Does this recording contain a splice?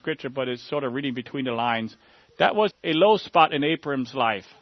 yes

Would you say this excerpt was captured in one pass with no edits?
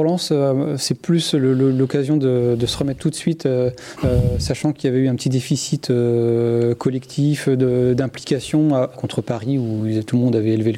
no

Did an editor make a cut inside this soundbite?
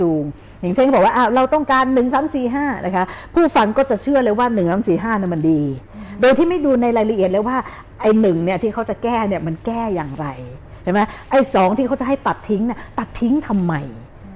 yes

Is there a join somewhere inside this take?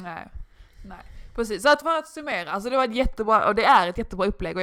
yes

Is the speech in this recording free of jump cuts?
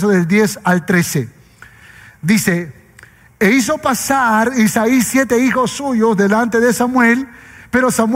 yes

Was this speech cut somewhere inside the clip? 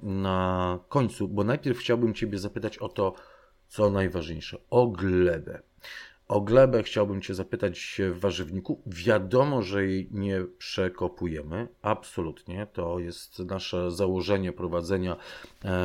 no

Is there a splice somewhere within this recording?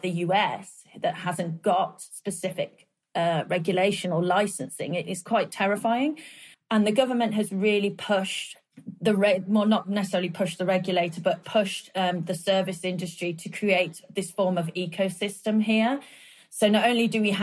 yes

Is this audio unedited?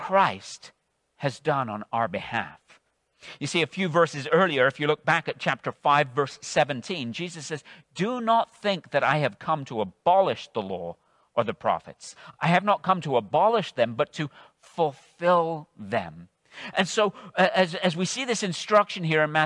yes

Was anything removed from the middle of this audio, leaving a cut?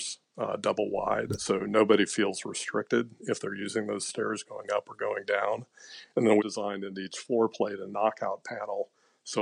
yes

